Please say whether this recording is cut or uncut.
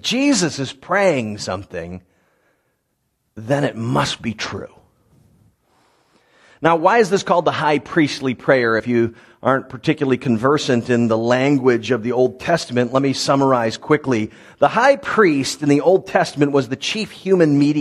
uncut